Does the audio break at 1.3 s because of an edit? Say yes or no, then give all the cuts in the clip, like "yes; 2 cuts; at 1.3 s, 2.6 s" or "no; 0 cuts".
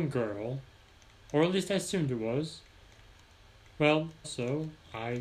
no; 1 cut; at 4.2 s